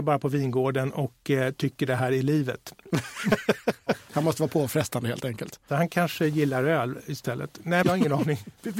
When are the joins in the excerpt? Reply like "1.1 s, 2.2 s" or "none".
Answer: 7.8 s